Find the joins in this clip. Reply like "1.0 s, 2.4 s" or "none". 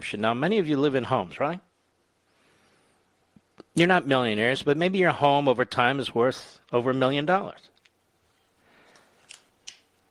none

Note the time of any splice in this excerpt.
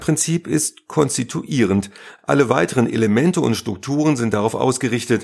none

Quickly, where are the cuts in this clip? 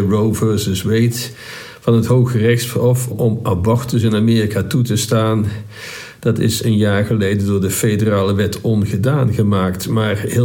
3.1 s

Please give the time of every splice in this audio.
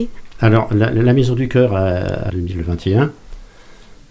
2.3 s

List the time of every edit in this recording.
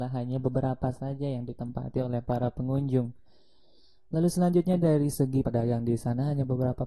5.4 s

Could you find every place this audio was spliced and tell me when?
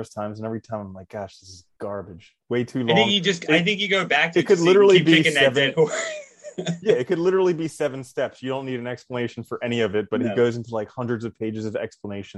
none

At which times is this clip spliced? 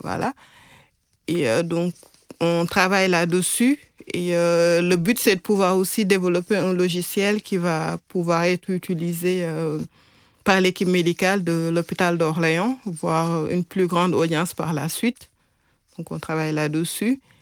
none

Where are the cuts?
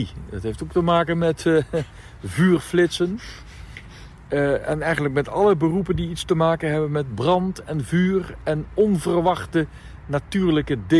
none

